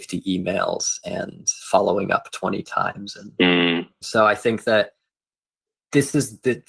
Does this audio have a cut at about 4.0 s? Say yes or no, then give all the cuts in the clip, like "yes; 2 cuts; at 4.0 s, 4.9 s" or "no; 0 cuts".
yes; 1 cut; at 4.0 s